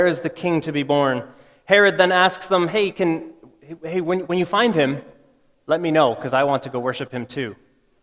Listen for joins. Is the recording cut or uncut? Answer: uncut